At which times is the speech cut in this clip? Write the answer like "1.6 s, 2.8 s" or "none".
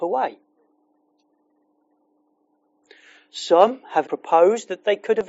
4.0 s